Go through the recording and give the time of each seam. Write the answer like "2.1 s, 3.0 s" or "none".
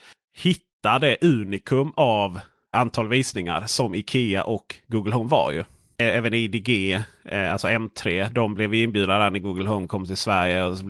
2.7 s